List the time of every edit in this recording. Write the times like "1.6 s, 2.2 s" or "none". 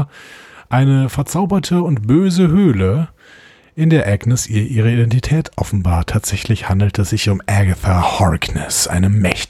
none